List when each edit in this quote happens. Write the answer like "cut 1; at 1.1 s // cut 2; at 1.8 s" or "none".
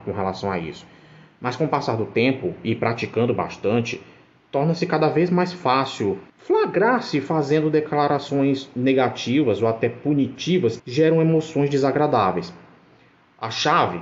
cut 1; at 6.3 s // cut 2; at 10.8 s